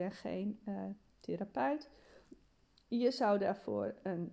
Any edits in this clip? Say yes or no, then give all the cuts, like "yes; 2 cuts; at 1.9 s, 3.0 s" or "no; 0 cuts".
no; 0 cuts